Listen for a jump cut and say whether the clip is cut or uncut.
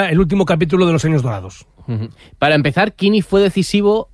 uncut